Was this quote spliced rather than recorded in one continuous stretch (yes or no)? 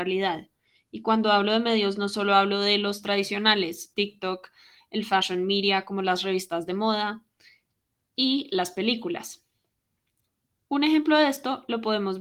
yes